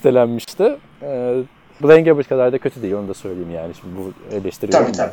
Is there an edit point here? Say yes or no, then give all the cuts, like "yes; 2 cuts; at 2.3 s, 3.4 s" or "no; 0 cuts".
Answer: yes; 1 cut; at 1.8 s